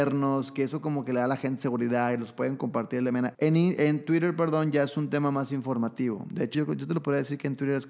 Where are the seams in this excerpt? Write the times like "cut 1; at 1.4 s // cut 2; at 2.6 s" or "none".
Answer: cut 1; at 3.3 s // cut 2; at 6.5 s